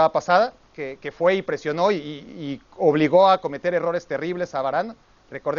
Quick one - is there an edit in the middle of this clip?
no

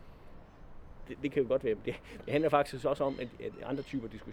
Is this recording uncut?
no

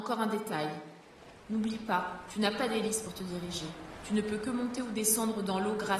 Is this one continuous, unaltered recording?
yes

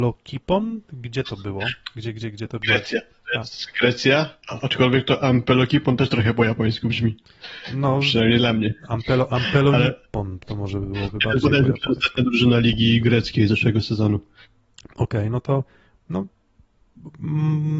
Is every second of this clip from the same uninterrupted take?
yes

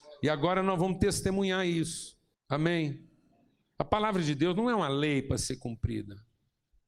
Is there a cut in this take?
yes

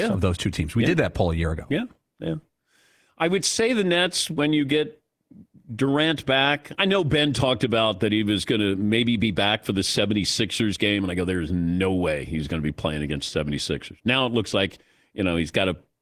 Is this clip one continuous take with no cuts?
no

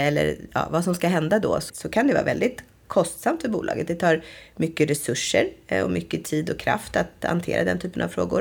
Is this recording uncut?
no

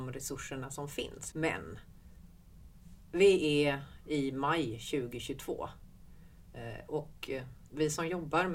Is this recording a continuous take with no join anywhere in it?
no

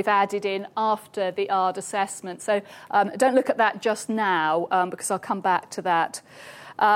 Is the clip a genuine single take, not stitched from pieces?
yes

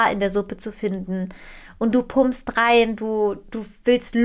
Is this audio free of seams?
yes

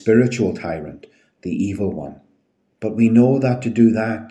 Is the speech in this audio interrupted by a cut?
yes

